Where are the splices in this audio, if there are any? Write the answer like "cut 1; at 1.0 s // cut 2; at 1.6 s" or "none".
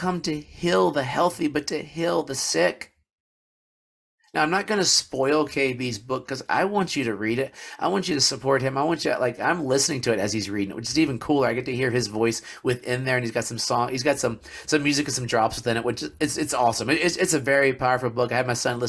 none